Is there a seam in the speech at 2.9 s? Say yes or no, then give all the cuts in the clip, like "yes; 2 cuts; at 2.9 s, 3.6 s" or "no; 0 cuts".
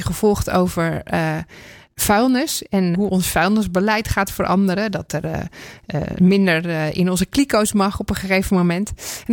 yes; 1 cut; at 2.9 s